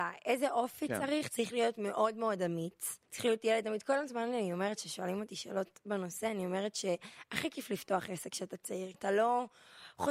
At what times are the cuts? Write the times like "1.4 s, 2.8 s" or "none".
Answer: 3.1 s, 8.9 s